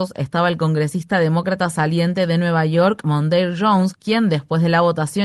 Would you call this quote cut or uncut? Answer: uncut